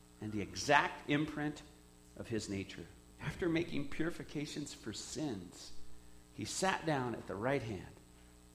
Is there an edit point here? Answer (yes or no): yes